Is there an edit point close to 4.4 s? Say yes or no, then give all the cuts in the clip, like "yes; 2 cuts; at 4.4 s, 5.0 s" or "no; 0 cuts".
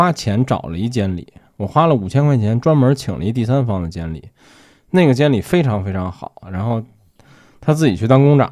no; 1 cut; at 6.4 s